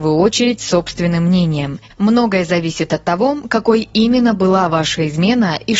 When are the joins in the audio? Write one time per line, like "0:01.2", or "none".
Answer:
0:01.9